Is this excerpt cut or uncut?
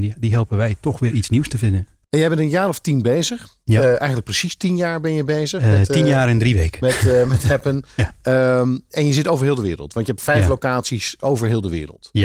uncut